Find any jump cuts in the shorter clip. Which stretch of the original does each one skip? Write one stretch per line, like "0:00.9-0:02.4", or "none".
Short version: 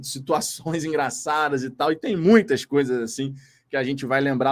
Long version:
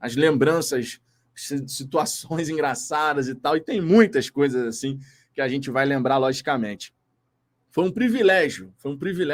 none